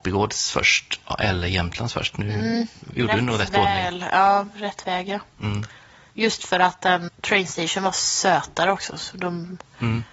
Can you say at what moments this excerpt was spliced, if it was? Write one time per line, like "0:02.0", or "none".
0:07.1